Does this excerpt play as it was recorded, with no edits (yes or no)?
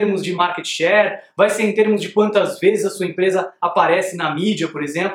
yes